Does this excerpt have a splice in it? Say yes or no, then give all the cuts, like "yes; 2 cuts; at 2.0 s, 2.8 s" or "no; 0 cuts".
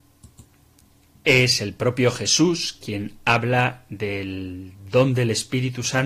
no; 0 cuts